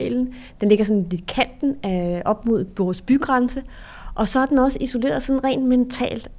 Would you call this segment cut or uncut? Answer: uncut